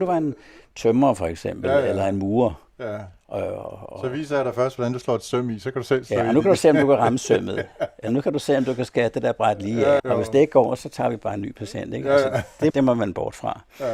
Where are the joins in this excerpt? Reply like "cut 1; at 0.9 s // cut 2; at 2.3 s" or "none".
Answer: cut 1; at 10.0 s // cut 2; at 12.7 s